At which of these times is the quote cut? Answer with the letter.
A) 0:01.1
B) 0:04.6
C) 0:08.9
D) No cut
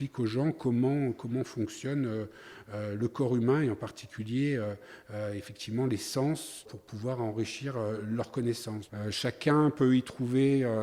C